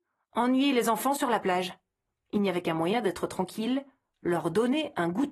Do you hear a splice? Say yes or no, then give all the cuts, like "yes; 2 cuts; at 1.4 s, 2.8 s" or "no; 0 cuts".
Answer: no; 0 cuts